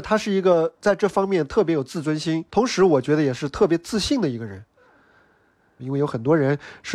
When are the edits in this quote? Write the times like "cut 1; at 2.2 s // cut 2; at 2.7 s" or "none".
cut 1; at 2.5 s // cut 2; at 5.8 s